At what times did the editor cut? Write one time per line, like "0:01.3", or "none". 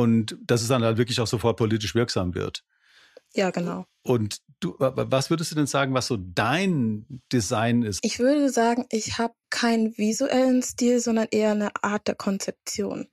0:08.0
0:09.4